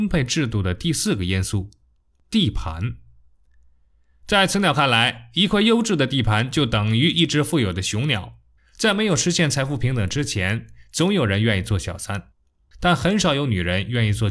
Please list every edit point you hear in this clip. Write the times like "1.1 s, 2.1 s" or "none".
8.6 s

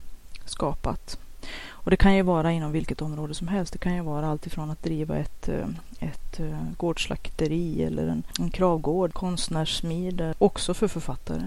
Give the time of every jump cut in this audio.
10.3 s

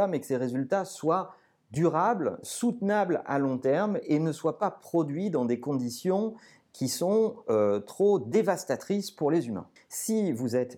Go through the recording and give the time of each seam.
9.8 s

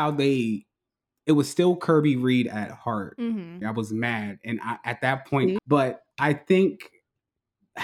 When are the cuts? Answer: 3.6 s, 5.6 s

